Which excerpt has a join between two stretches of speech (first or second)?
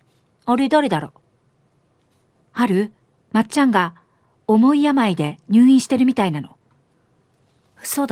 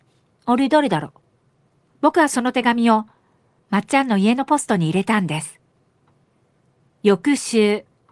second